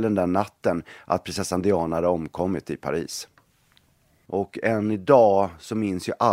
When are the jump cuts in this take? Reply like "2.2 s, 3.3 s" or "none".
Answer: 4.3 s